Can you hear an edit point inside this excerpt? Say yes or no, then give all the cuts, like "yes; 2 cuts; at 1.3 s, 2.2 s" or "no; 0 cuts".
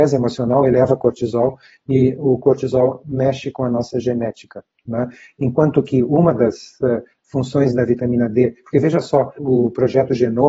yes; 1 cut; at 9.4 s